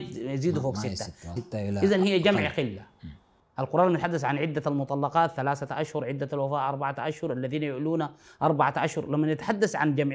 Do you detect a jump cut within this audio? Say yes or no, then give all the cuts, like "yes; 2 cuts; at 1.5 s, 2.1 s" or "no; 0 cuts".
yes; 1 cut; at 1.4 s